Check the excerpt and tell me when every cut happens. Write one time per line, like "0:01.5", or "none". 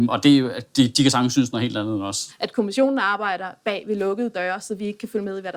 0:02.3